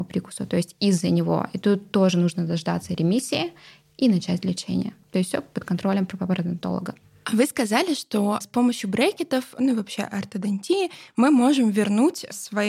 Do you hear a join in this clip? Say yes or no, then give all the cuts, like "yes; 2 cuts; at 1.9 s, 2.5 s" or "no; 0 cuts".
no; 0 cuts